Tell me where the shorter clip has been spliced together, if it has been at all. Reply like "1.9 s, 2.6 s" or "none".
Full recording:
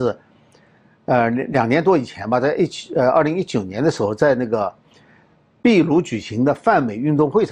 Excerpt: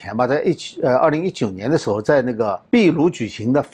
2.7 s